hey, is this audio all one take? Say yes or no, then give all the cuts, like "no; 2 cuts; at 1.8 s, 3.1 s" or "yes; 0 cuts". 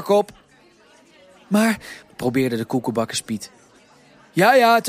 no; 1 cut; at 2.0 s